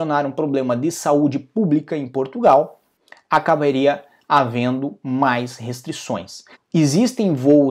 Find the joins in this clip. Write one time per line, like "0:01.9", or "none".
0:06.5